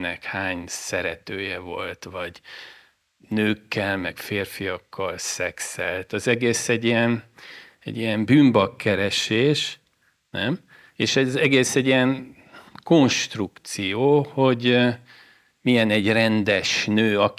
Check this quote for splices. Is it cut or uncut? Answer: cut